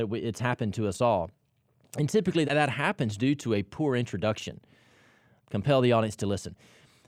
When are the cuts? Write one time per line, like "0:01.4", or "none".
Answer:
0:02.5
0:05.4

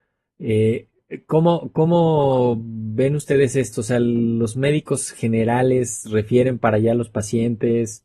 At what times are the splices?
none

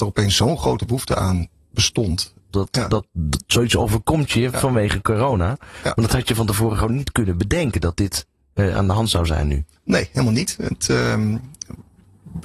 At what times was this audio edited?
0:02.5

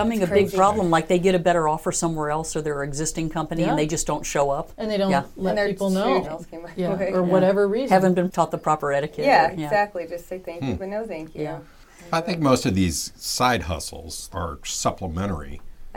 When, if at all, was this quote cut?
0:06.2
0:14.3

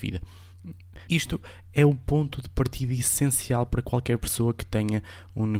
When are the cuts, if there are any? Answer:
0:01.1

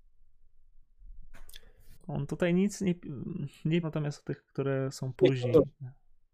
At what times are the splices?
0:02.0
0:03.8

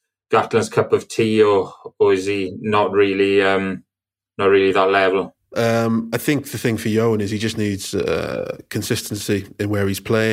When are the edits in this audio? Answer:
0:05.5

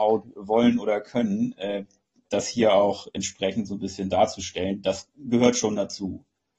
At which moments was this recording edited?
none

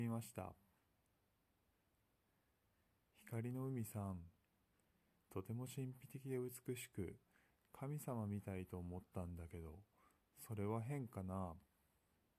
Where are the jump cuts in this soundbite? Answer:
0:05.2

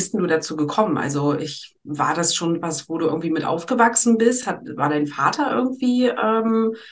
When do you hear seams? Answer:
none

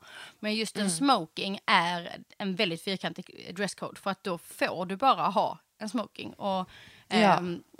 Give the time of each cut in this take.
none

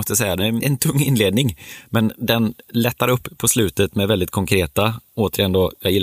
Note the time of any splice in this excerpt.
none

